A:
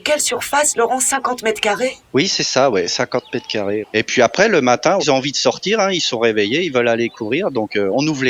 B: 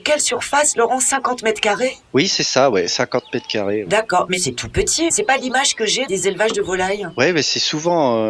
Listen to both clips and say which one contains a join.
A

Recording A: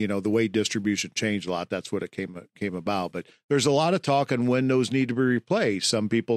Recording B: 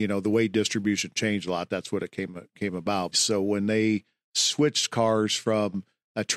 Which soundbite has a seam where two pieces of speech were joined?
B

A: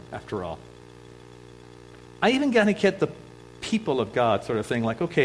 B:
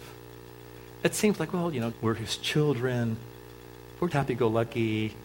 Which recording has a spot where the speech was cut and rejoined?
B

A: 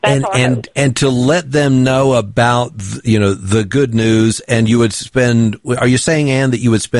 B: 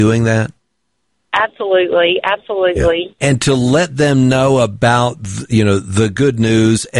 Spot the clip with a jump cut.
B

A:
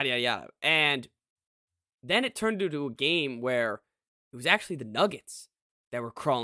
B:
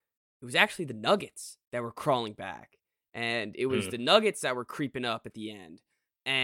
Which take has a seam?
B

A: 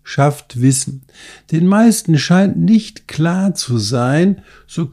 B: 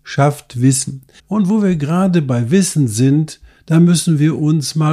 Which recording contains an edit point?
B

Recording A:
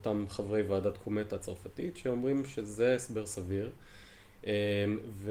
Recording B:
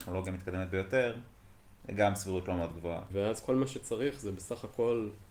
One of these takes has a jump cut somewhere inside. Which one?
B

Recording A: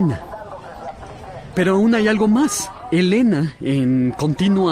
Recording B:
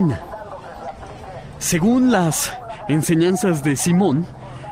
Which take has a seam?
A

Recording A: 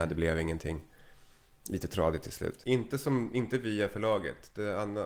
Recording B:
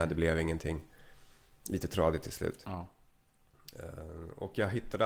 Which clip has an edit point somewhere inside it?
A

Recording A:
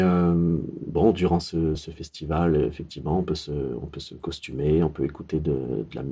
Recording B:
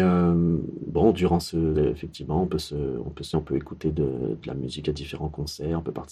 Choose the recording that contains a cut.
B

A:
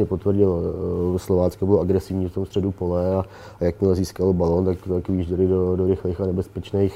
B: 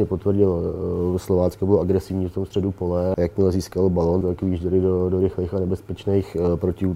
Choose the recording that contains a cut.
B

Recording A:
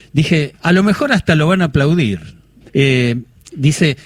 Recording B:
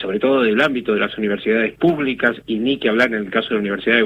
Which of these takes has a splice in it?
A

